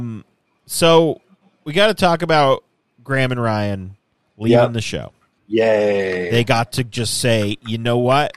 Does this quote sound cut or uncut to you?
cut